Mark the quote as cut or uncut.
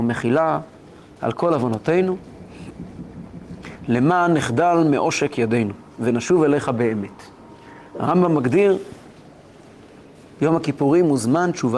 uncut